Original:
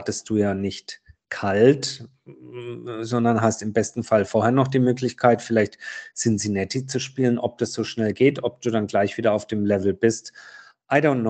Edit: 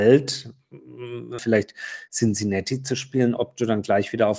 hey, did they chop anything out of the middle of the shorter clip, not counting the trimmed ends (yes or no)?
yes